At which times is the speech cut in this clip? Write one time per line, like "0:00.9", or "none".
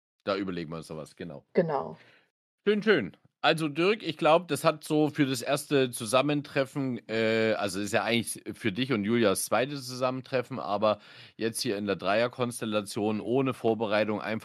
none